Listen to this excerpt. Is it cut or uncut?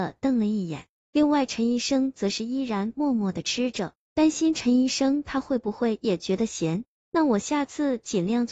uncut